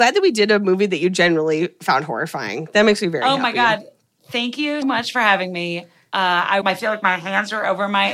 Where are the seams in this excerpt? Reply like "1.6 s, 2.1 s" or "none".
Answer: 4.8 s, 6.6 s